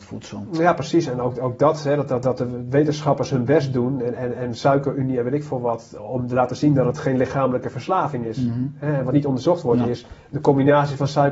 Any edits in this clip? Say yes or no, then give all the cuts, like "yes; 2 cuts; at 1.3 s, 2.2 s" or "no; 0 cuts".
no; 0 cuts